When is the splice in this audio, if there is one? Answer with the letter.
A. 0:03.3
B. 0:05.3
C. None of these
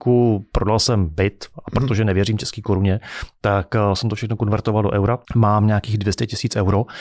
B